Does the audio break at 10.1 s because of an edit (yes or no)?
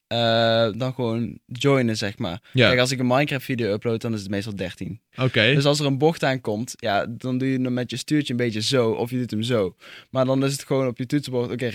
no